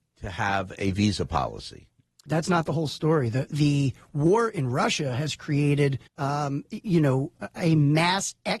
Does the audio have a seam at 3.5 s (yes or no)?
yes